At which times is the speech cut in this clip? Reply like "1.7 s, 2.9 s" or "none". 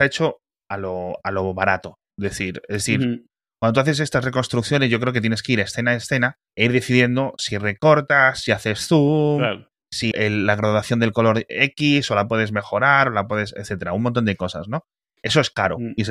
6.5 s, 10.1 s